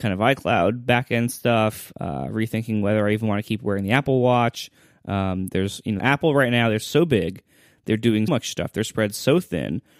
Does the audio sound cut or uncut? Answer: cut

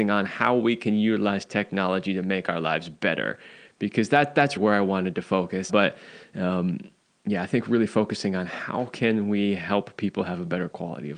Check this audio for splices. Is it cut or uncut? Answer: cut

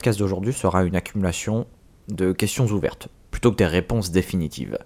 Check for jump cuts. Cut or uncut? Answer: uncut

